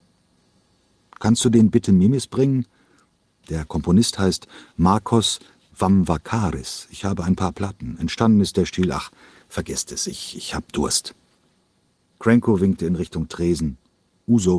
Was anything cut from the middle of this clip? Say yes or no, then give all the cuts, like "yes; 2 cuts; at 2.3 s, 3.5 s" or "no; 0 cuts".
yes; 1 cut; at 3.4 s